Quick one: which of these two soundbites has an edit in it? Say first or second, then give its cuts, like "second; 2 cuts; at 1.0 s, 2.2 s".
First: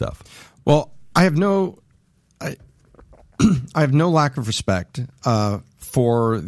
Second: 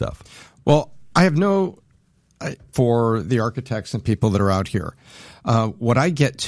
second; 1 cut; at 2.7 s